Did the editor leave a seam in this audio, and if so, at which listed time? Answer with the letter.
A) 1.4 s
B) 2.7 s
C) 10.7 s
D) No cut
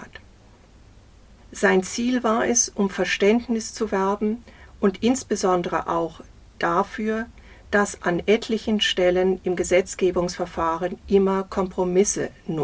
A